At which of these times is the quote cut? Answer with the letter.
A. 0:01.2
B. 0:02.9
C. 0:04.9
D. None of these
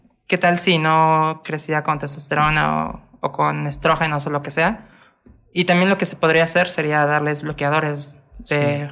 D